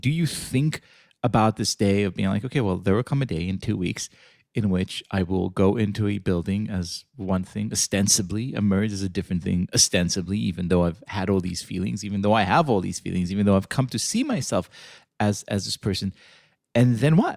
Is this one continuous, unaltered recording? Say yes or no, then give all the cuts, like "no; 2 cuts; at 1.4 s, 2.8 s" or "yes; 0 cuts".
yes; 0 cuts